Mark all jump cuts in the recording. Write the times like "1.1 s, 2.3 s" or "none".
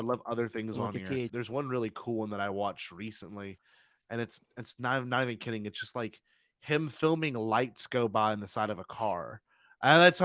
1.3 s